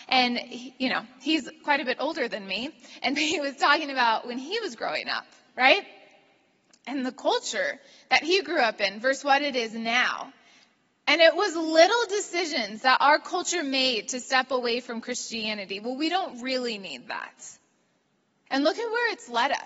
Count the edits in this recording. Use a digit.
1